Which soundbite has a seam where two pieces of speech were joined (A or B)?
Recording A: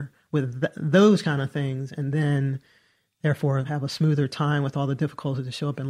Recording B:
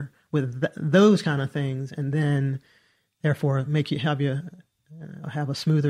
A